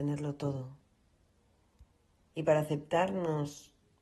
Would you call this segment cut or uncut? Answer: cut